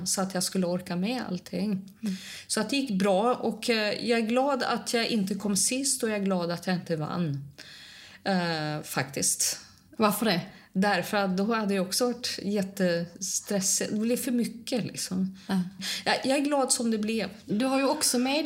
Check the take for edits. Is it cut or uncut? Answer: uncut